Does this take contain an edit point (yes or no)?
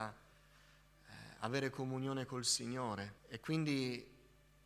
yes